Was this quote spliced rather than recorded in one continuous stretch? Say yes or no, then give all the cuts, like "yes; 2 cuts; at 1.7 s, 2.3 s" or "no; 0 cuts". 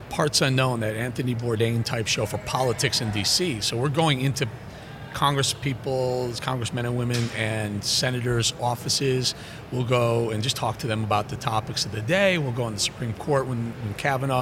no; 0 cuts